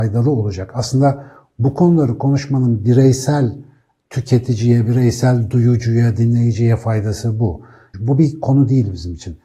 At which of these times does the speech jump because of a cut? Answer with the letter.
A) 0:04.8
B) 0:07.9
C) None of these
B